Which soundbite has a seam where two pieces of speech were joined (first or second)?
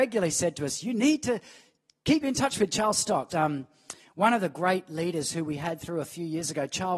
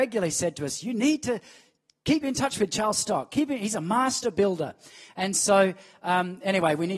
first